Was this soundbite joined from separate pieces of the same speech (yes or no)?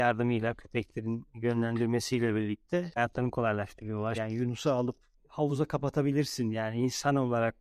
yes